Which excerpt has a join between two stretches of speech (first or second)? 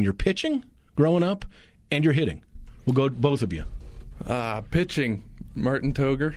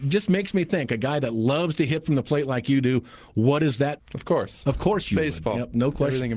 second